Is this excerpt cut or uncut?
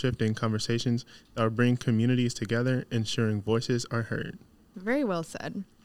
cut